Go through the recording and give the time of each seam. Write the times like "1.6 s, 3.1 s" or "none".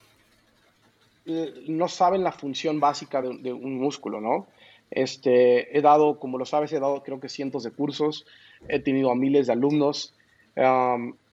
none